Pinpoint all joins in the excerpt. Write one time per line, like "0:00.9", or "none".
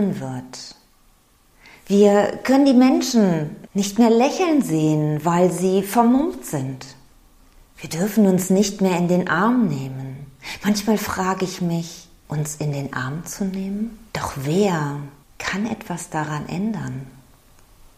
0:12.2
0:14.1

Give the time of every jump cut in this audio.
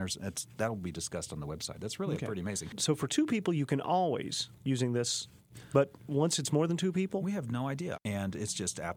0:05.5
0:07.9

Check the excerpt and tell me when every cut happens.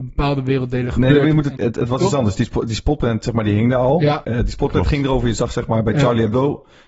0:01.6
0:04.2

